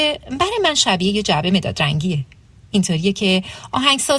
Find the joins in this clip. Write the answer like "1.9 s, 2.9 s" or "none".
none